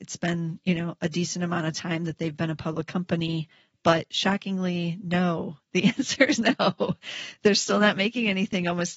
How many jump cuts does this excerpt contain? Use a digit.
1